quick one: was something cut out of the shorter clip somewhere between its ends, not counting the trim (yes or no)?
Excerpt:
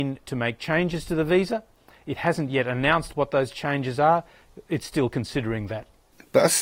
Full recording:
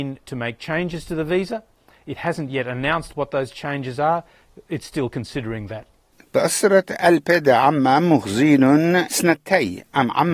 no